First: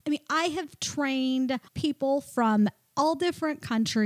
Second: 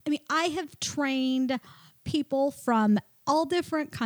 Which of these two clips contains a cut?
first; 1 cut; at 1.7 s

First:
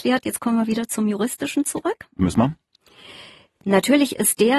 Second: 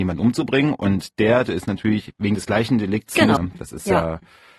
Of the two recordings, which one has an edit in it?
second; 2 cuts; at 1.5 s, 3.4 s

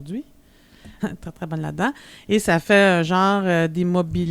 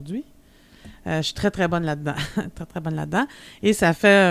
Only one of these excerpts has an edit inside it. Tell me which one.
first; 1 cut; at 1.0 s

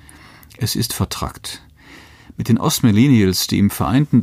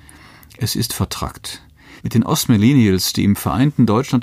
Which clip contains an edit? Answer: second; 1 cut; at 2.0 s

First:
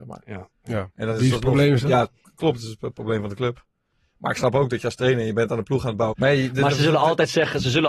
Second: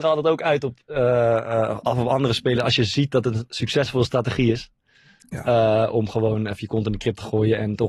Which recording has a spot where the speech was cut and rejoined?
first; 1 cut; at 6.1 s

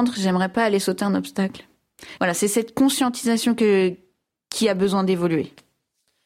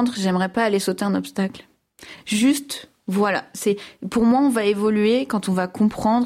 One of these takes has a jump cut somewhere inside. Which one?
first; 1 cut; at 2.2 s

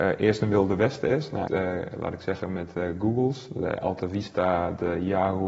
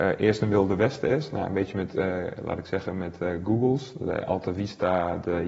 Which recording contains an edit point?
first; 1 cut; at 1.5 s

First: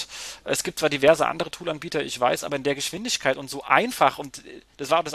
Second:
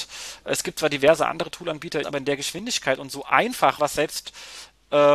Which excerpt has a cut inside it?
second; 2 cuts; at 2.0 s, 3.8 s

